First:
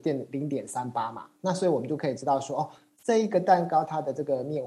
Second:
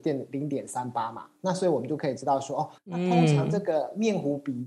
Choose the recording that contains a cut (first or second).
second